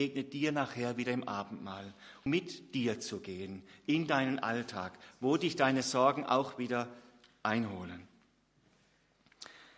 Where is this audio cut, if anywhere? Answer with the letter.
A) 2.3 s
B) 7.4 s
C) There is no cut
A